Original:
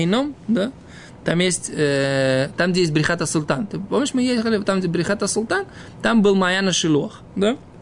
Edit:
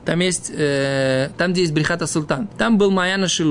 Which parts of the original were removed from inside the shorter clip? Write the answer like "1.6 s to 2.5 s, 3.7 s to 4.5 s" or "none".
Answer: 3.7 s to 5.9 s